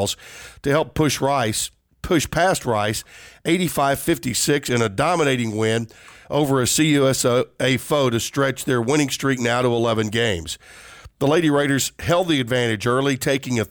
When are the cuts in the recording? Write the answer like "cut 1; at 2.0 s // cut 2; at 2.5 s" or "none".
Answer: none